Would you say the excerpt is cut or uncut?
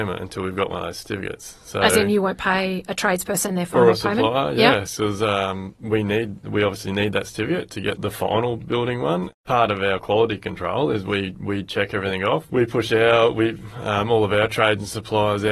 uncut